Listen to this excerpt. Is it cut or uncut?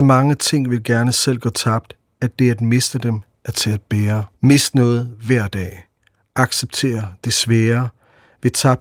cut